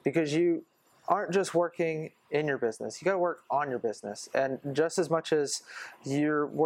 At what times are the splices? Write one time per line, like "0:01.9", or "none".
none